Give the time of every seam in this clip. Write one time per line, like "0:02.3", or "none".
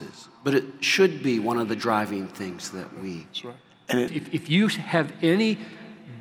0:04.1